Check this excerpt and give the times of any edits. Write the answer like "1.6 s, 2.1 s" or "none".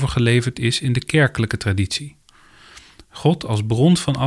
none